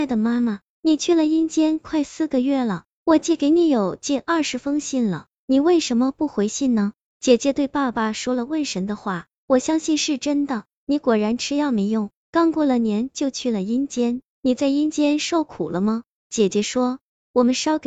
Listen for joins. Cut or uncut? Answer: uncut